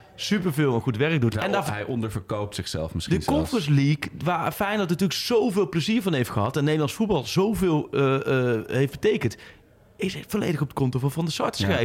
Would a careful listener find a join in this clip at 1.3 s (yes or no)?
yes